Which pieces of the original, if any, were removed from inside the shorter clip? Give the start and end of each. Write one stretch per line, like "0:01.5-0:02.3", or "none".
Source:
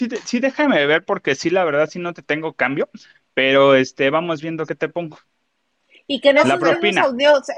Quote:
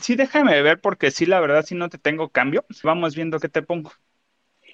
0:03.1-0:04.1